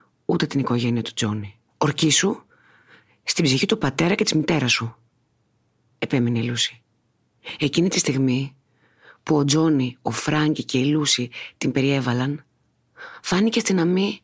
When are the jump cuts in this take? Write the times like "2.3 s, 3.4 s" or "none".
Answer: 1.7 s